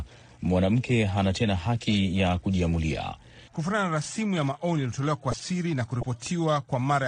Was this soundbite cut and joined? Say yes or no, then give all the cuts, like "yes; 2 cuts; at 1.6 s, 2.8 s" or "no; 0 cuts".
yes; 1 cut; at 3.5 s